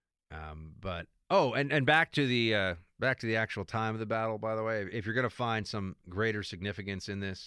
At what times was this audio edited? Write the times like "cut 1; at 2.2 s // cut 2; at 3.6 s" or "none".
none

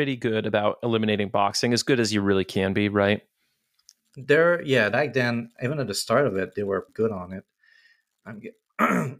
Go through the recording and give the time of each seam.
cut 1; at 4.9 s // cut 2; at 6.9 s

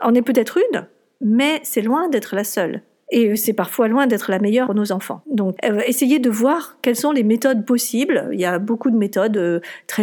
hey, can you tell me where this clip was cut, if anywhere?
none

